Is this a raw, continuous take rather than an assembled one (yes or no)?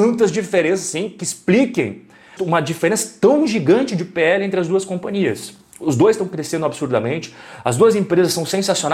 no